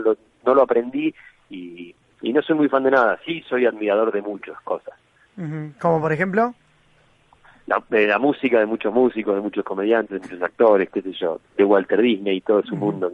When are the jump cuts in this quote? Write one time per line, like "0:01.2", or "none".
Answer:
0:11.4